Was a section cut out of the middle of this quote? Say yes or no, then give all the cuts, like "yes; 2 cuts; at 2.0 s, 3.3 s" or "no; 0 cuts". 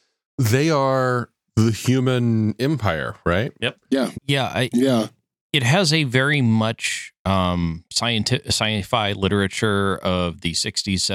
yes; 1 cut; at 4.1 s